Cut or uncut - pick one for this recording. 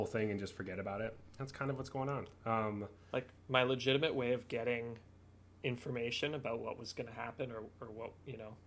uncut